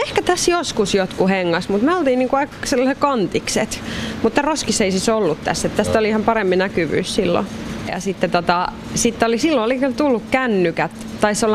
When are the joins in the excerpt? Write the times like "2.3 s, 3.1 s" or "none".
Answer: 7.9 s